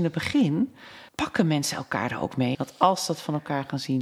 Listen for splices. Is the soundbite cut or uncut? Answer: cut